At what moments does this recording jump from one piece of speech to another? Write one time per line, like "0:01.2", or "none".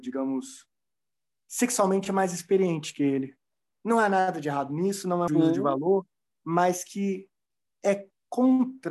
0:05.3

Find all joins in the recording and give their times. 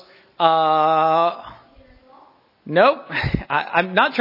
none

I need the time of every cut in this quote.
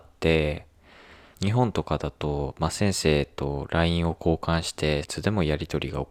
0:01.3
0:05.0

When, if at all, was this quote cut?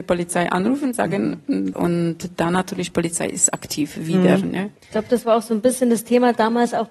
0:01.7

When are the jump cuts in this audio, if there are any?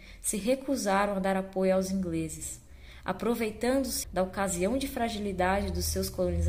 0:04.0

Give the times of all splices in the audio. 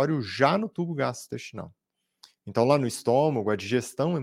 none

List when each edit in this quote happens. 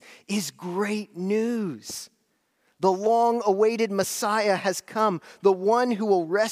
none

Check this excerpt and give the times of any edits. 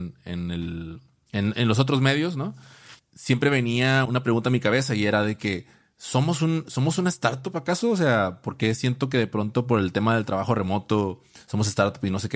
0:03.0
0:04.0

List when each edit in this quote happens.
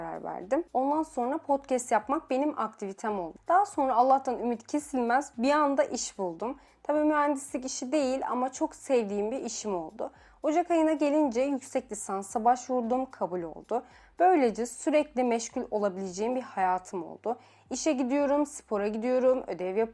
0:03.4

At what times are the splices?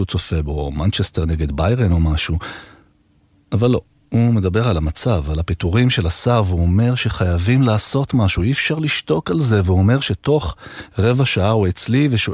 none

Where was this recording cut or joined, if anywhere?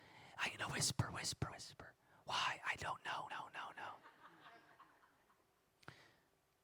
0:01.5
0:03.3

